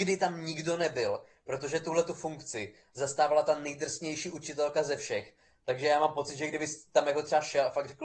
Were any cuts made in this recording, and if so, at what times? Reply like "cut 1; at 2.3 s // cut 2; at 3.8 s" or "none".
none